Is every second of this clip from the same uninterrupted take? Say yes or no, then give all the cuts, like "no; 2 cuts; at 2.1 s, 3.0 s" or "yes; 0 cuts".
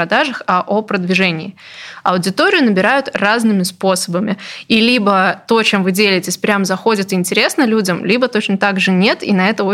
no; 1 cut; at 4.7 s